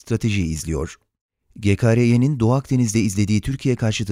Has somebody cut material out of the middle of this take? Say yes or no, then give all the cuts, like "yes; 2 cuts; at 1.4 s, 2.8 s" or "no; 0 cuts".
no; 0 cuts